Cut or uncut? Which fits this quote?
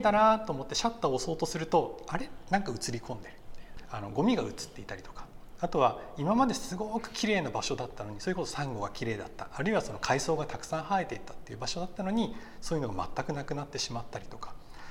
uncut